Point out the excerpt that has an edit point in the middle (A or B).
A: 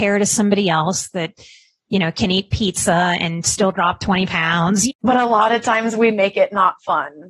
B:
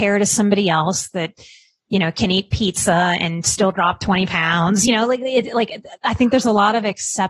A